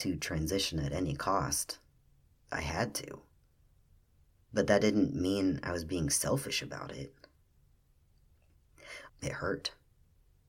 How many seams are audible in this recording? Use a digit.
1